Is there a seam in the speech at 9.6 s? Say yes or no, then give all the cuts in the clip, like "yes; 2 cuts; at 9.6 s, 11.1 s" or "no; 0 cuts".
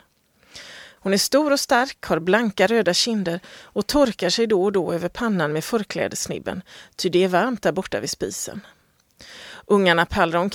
no; 1 cut; at 1.0 s